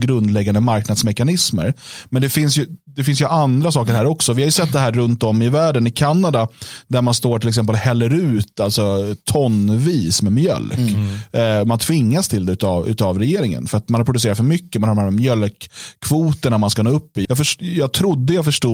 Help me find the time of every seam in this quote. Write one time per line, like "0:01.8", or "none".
0:17.2